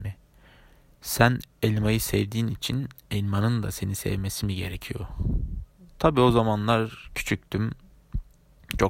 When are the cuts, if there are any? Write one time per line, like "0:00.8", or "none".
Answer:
0:01.0